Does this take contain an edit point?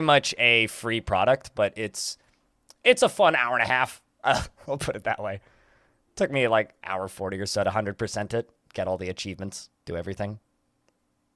no; 0 cuts

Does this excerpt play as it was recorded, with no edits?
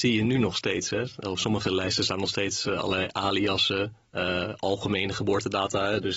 yes; 0 cuts

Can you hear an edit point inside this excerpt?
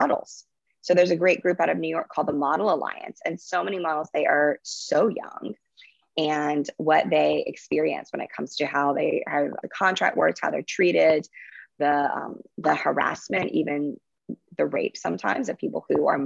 yes; 1 cut; at 9.6 s

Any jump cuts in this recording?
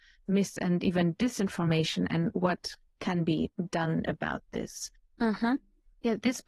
yes; 1 cut; at 5.1 s

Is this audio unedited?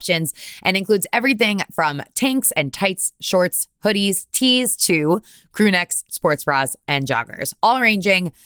yes; 0 cuts

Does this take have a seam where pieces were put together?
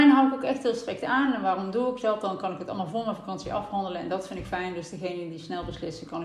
no; 0 cuts

